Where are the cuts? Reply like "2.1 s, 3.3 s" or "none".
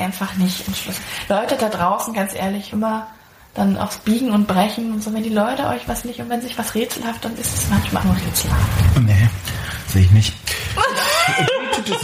2.7 s, 8.0 s